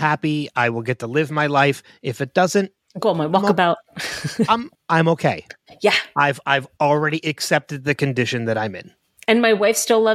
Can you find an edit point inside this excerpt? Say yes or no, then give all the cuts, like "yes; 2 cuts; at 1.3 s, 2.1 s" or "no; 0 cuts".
yes; 1 cut; at 4.8 s